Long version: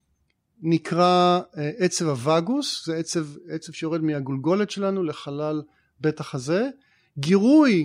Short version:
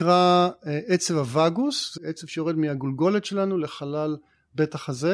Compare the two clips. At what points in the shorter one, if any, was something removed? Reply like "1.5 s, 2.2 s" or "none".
2.0 s